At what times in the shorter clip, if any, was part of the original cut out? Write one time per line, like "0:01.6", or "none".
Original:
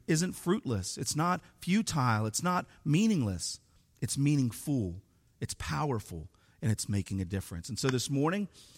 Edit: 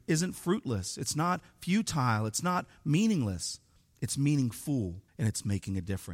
0:05.1